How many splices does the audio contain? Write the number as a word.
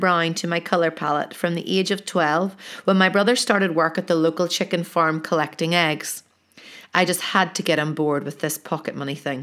zero